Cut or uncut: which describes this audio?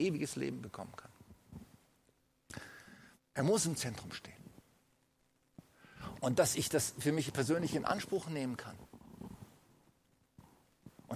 cut